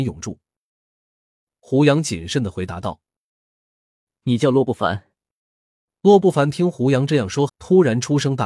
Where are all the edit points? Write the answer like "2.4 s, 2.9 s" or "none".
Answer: 5.4 s, 7.5 s

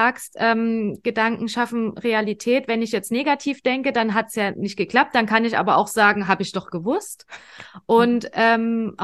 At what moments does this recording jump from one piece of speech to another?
none

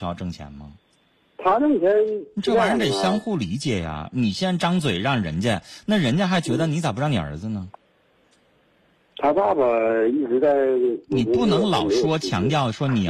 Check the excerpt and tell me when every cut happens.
none

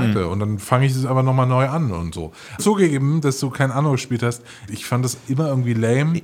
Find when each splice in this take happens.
2.6 s, 4.7 s

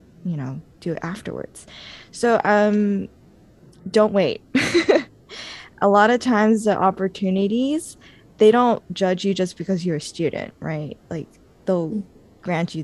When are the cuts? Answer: none

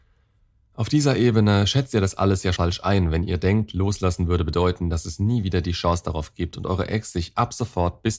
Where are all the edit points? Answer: 2.6 s

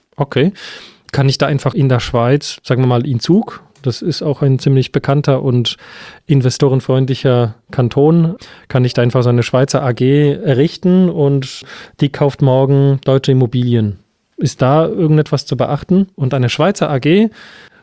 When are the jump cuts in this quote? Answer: 1.7 s, 16.1 s

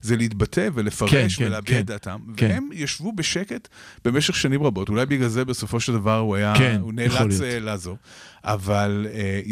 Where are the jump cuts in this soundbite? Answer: 1.4 s

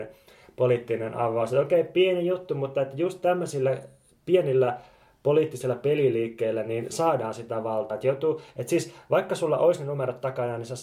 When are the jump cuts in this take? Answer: none

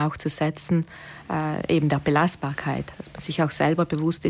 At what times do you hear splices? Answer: none

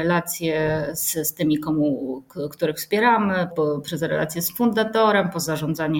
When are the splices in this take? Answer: 3.5 s

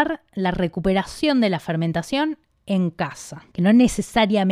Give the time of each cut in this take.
3.5 s

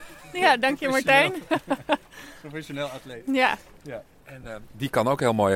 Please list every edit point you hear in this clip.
none

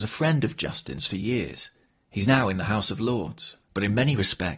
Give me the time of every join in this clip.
3.6 s

